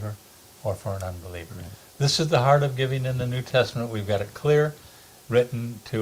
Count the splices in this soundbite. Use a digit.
0